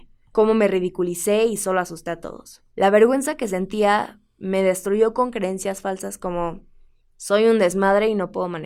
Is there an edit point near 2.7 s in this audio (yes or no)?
yes